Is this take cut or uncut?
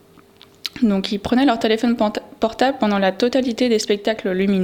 uncut